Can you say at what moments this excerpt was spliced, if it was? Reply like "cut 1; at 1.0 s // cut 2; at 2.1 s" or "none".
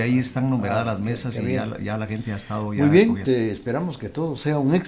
cut 1; at 3.2 s